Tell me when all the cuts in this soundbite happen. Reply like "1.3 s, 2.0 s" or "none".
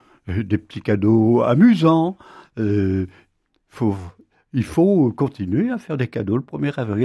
none